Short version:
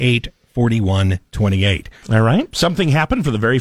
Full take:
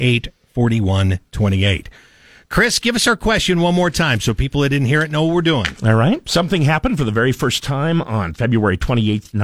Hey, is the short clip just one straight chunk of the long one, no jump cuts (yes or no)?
no